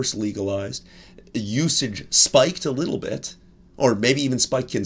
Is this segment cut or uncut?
uncut